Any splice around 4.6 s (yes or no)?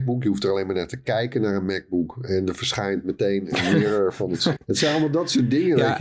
yes